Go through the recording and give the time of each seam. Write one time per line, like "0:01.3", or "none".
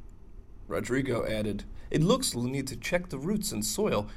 0:02.3